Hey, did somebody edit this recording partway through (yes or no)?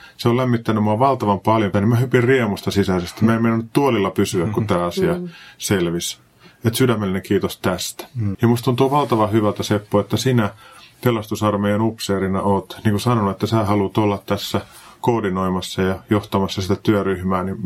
yes